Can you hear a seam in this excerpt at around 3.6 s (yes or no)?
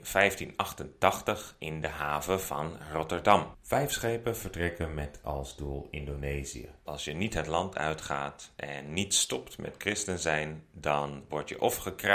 no